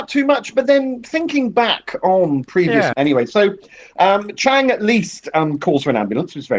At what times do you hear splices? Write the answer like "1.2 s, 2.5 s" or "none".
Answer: 2.9 s